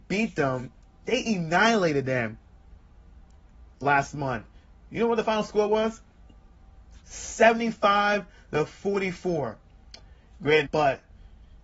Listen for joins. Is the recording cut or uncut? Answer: cut